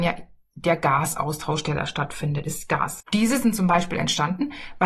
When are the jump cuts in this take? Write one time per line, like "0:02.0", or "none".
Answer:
0:03.0